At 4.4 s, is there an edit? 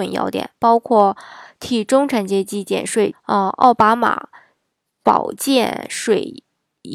no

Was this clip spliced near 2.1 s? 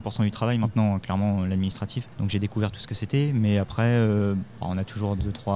yes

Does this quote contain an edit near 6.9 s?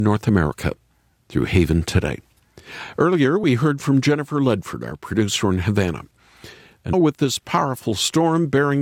yes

